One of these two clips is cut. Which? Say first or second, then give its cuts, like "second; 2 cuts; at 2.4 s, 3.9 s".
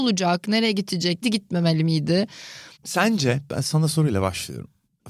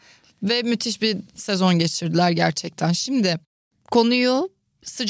first; 2 cuts; at 1.2 s, 2.8 s